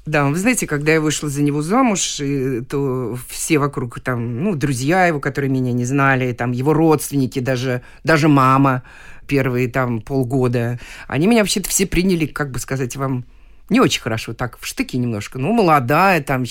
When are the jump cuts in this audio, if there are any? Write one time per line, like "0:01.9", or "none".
none